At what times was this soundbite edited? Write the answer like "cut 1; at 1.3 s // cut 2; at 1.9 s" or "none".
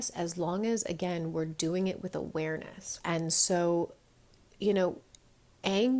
cut 1; at 3.0 s